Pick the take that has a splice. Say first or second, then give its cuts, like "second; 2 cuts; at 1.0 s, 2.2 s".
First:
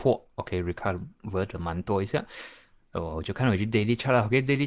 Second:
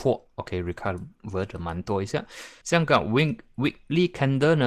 second; 1 cut; at 2.6 s